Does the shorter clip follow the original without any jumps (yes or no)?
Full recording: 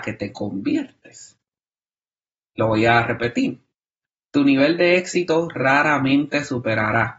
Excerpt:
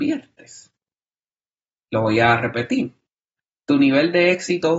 yes